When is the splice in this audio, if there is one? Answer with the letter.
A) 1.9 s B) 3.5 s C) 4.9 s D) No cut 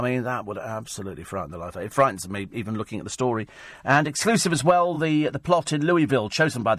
D